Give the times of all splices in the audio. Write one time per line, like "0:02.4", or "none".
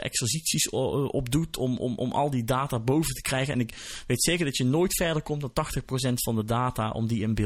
none

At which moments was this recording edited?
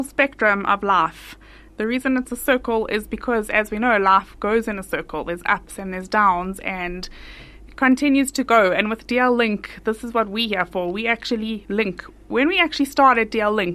none

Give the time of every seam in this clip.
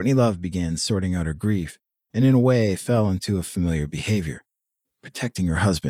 none

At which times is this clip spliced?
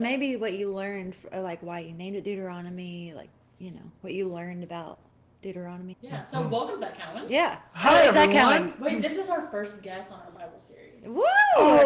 0:05.9

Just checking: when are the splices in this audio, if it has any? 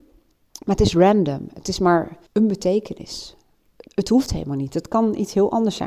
0:02.3

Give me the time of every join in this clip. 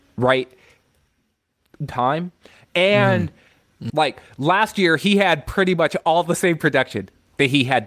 0:01.9
0:03.9

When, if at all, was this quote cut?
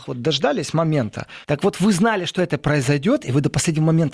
0:01.4

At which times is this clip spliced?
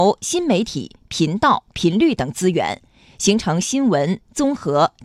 none

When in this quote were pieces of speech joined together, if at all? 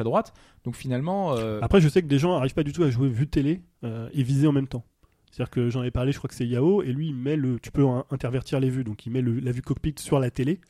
none

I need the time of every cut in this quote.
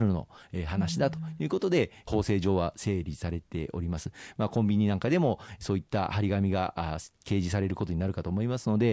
none

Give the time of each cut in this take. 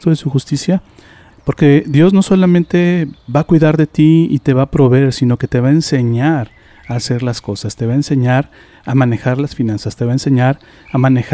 0:01.3

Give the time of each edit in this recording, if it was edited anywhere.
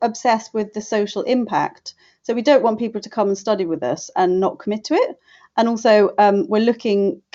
none

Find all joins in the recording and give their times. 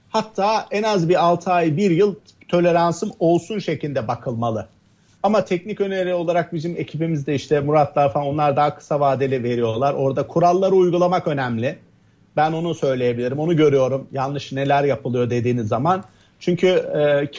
none

